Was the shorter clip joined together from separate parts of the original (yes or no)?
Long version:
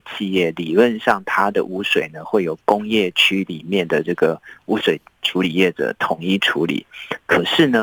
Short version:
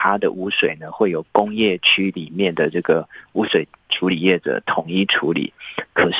no